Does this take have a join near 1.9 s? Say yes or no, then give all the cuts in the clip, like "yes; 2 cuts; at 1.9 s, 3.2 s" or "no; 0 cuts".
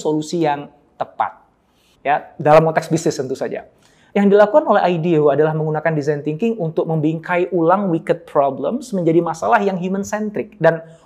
yes; 1 cut; at 1.9 s